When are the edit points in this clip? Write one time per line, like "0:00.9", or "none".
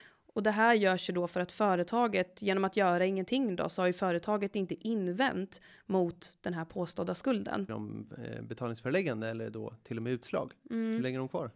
0:07.7